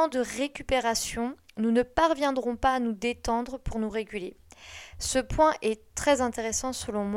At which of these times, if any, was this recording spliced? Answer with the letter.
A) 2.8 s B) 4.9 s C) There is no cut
C